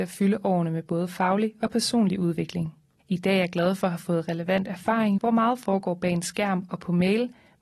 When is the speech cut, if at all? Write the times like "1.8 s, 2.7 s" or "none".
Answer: 3.0 s, 5.2 s

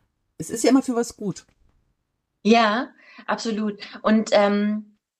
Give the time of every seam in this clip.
none

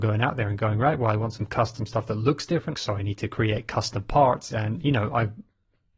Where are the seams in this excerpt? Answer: 2.7 s, 4.5 s

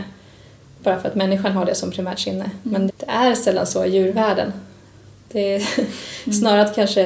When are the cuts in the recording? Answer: 2.9 s

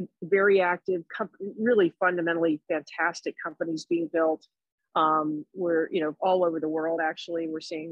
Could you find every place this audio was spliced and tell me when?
none

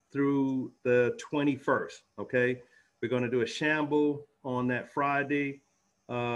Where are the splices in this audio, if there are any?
none

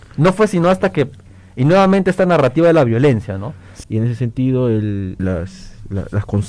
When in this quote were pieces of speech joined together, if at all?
3.8 s, 5.2 s

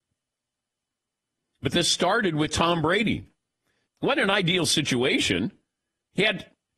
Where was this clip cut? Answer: 3.8 s

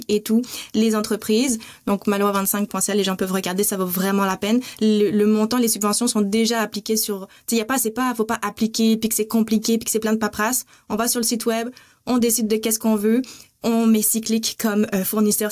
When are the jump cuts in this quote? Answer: none

